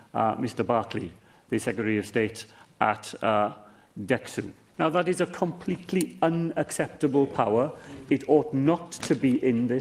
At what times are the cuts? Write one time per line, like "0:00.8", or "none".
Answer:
0:04.7

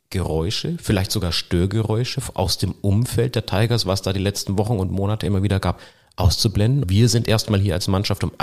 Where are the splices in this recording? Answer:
0:06.8

